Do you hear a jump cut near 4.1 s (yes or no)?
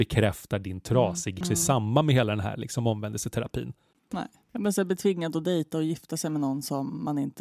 yes